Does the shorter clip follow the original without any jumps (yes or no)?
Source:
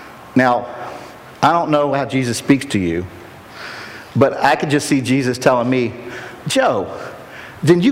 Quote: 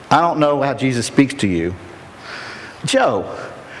no